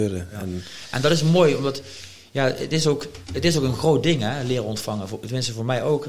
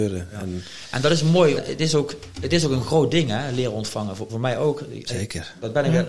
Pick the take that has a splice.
second; 2 cuts; at 1.6 s, 4.3 s

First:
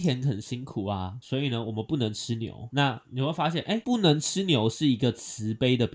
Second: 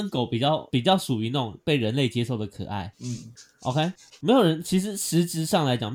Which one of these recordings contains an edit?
second; 1 cut; at 2.9 s

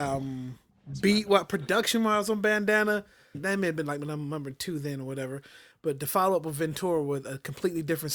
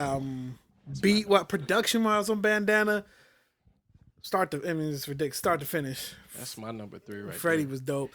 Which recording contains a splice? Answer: first; 1 cut; at 3.3 s

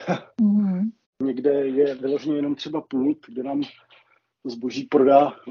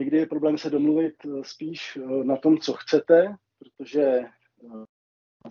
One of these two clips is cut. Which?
first; 1 cut; at 1.0 s

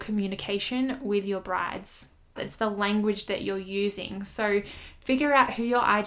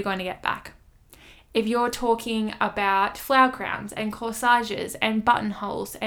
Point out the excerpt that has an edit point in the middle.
first; 1 cut; at 2.4 s

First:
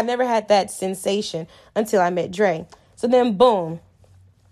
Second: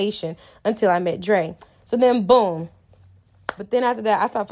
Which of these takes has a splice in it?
second; 1 cut; at 3.6 s

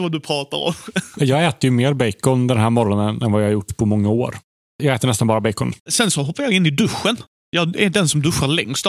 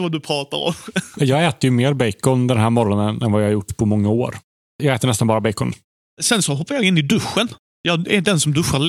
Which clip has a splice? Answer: first; 1 cut; at 5.8 s

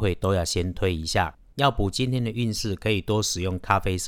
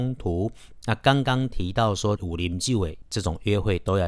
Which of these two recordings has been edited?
second; 1 cut; at 2.2 s

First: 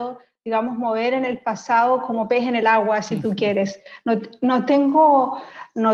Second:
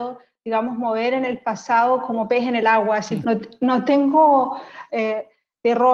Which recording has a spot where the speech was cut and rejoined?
second; 2 cuts; at 3.2 s, 4.9 s

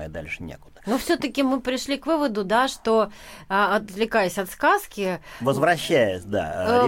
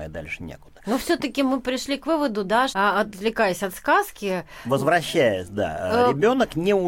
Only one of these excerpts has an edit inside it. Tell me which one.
second; 1 cut; at 2.7 s

